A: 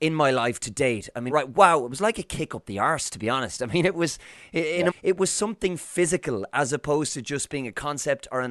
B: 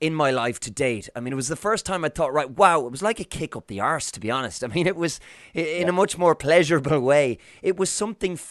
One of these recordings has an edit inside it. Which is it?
A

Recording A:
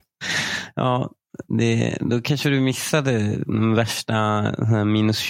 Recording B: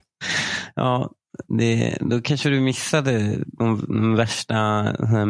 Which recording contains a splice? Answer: A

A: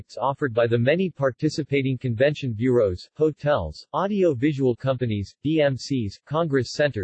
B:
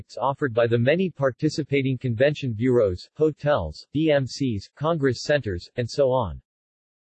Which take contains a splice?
B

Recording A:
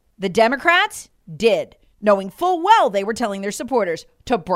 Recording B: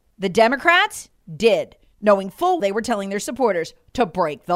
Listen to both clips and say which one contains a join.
B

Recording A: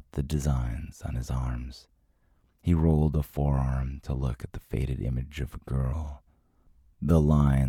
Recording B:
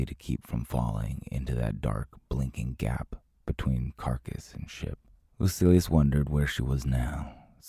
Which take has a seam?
B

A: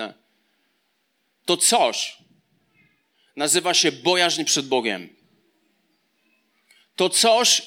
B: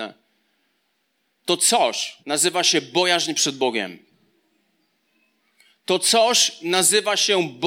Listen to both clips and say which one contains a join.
B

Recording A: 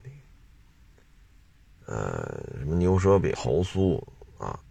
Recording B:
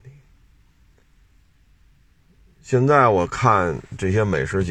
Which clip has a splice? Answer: A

